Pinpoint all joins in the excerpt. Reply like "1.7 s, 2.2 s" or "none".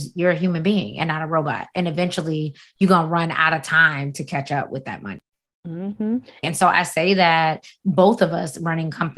6.4 s

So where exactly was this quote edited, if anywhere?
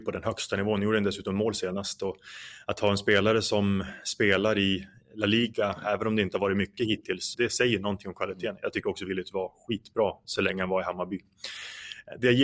7.3 s

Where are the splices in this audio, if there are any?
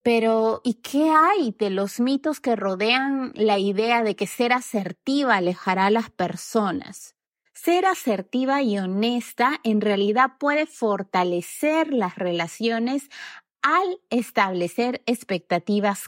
7.5 s

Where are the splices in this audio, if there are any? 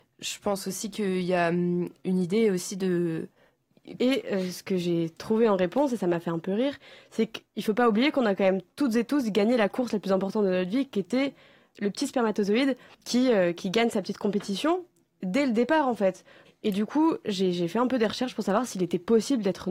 4.0 s, 16.4 s

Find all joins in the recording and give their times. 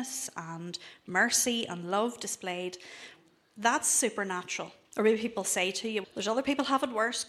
4.8 s, 6.0 s

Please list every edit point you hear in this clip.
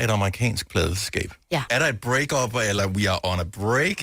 1.7 s, 2.8 s

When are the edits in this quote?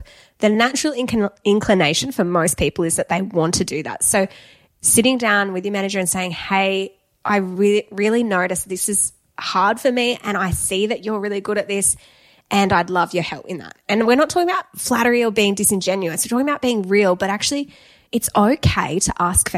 none

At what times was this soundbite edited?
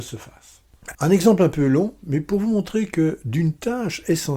0.9 s

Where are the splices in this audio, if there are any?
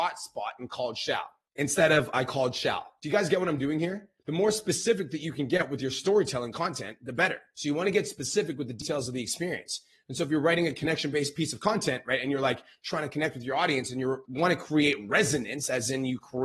none

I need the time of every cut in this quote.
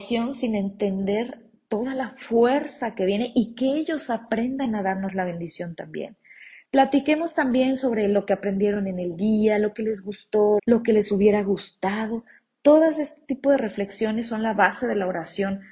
6.7 s, 10.6 s

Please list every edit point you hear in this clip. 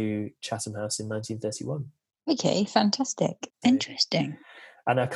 3.5 s

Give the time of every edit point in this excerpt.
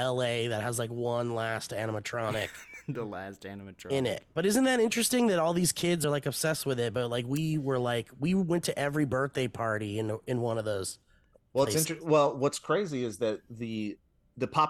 none

